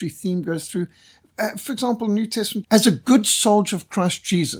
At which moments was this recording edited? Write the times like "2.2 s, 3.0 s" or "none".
2.6 s